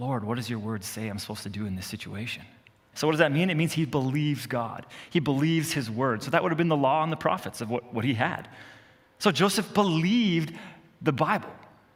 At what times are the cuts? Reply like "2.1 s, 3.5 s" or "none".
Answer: 2.9 s